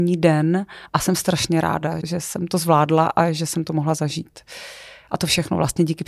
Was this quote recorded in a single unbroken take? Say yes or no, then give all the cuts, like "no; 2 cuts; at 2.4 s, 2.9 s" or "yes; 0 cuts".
no; 1 cut; at 2.0 s